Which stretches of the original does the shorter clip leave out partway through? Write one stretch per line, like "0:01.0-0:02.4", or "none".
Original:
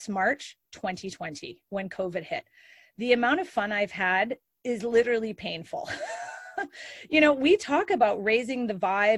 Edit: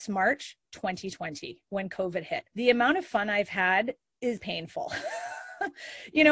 0:02.5-0:02.9
0:04.8-0:05.3